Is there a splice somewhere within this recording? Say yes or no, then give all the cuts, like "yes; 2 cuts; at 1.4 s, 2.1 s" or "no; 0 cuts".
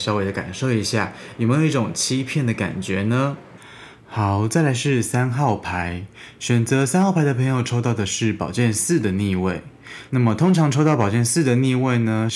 yes; 1 cut; at 10.1 s